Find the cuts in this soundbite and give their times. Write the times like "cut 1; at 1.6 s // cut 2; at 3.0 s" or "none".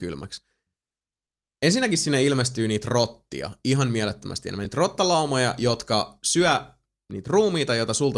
none